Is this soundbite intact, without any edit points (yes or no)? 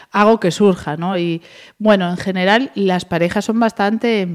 yes